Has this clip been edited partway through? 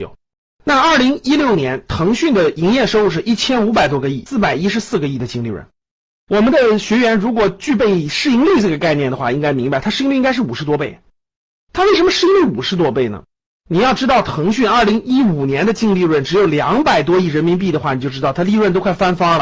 no; 0 cuts

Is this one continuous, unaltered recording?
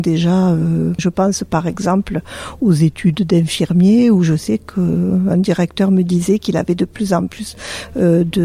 no; 1 cut; at 1.0 s

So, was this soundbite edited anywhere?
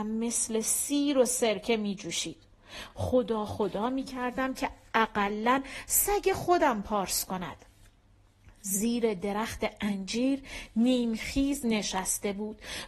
no; 0 cuts

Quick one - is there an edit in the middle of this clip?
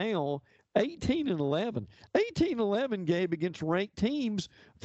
no; 0 cuts

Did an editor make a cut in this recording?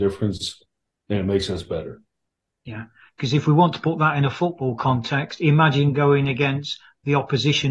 yes; 1 cut; at 2.6 s

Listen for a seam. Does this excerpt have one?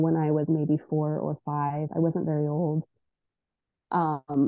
no; 0 cuts

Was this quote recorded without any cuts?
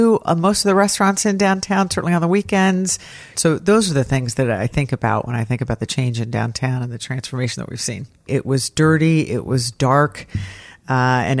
no; 2 cuts; at 3.4 s, 8.3 s

